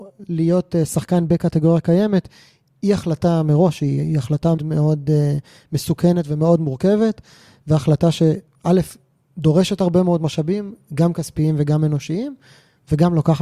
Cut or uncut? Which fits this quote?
cut